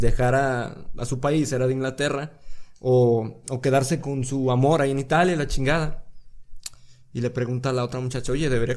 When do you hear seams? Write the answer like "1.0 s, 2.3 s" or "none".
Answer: 1.0 s